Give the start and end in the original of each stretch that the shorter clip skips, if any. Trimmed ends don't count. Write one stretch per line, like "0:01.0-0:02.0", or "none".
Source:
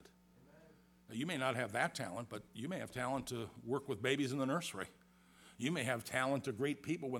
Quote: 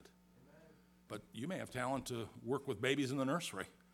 0:01.1-0:02.3